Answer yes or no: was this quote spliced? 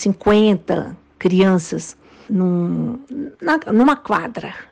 yes